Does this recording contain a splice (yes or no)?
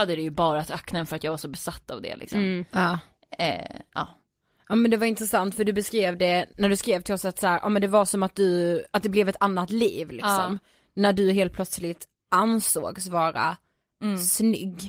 no